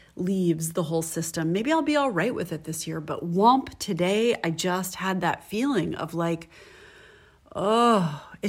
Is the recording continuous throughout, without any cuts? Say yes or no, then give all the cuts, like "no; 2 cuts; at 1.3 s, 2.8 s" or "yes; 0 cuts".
yes; 0 cuts